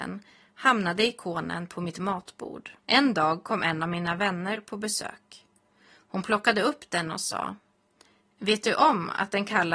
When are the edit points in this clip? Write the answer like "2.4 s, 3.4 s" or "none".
2.8 s